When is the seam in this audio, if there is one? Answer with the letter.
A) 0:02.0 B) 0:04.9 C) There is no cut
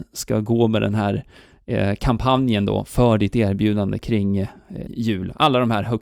B